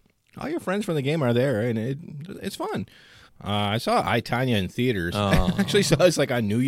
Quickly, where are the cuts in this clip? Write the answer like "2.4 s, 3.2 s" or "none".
3.3 s